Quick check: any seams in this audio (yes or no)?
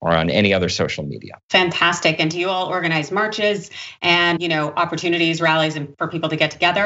yes